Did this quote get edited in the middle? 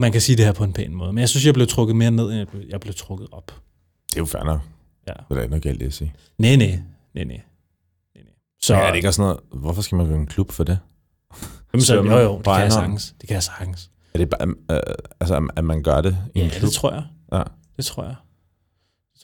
yes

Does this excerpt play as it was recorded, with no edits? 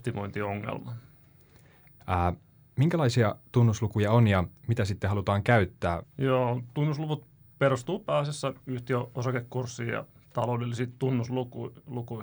no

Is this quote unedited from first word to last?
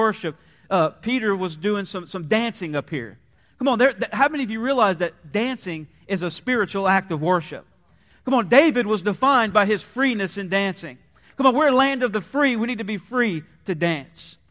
yes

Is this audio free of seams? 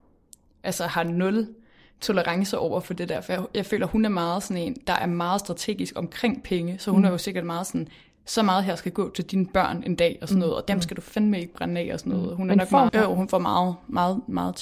no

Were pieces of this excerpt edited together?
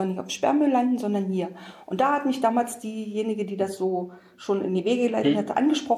no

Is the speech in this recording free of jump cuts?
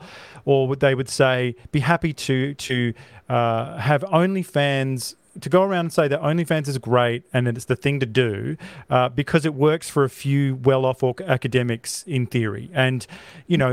yes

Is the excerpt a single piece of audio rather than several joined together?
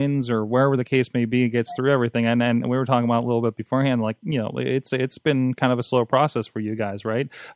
yes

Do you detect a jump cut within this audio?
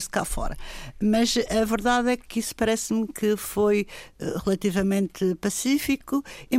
no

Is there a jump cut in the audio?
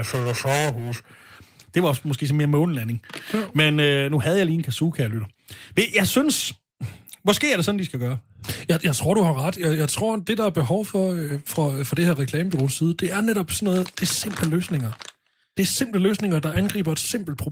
no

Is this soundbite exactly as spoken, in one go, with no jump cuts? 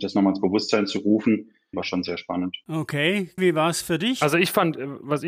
no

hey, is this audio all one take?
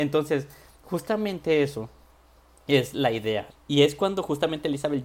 no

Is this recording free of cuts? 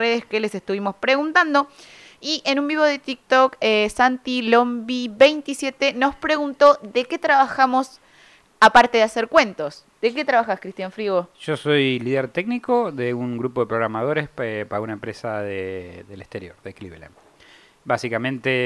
yes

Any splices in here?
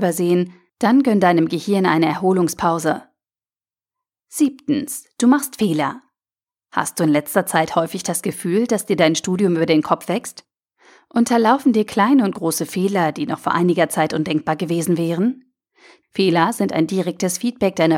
yes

